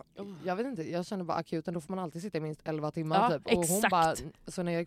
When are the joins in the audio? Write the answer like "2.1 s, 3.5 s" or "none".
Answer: none